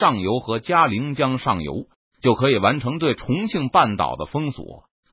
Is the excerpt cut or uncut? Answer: uncut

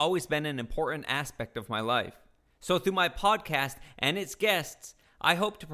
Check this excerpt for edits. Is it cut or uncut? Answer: cut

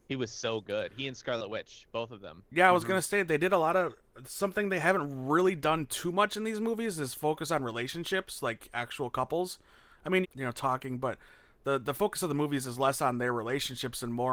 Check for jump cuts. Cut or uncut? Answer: cut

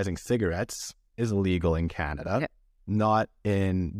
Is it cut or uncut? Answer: uncut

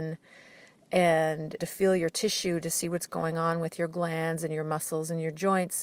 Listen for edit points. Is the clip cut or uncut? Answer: cut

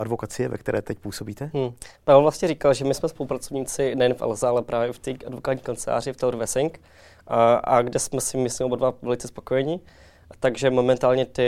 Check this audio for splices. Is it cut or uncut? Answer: uncut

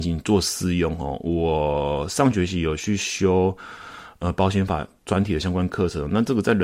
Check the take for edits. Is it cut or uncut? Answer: uncut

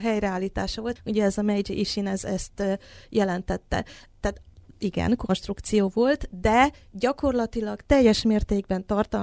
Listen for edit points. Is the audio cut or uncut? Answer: cut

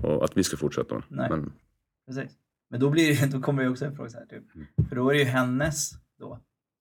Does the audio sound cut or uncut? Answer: uncut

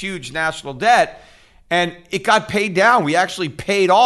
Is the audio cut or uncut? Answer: uncut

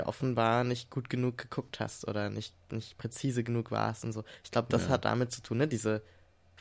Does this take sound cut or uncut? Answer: uncut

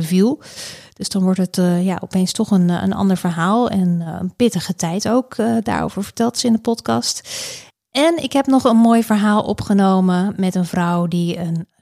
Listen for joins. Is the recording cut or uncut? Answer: uncut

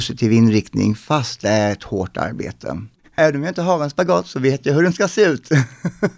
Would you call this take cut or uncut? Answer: cut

